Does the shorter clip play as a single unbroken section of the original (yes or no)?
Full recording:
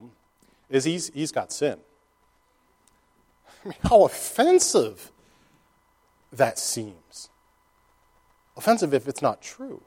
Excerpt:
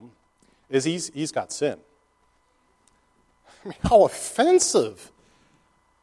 yes